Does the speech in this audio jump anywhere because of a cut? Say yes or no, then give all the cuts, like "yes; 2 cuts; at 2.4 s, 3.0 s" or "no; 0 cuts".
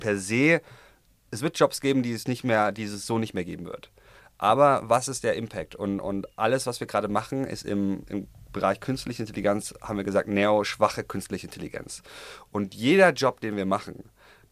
no; 0 cuts